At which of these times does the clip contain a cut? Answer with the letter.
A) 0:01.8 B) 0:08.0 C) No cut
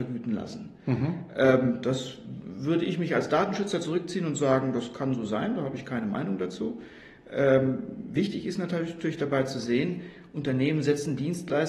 C